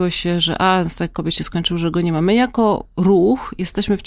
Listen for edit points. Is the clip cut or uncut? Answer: uncut